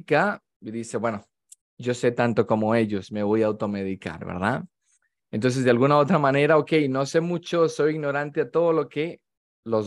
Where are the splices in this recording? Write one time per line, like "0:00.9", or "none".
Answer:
none